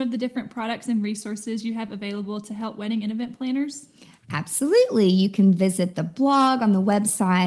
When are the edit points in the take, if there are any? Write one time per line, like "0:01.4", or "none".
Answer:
none